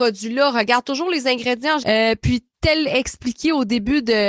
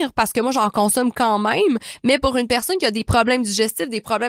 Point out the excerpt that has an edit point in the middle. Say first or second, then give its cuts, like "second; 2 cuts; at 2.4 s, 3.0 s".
first; 1 cut; at 1.8 s